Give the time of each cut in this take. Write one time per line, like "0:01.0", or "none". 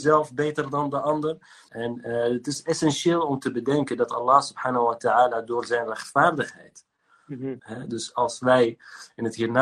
0:01.7
0:07.6